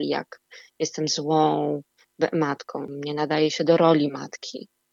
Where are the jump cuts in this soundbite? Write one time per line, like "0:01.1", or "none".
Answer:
0:02.8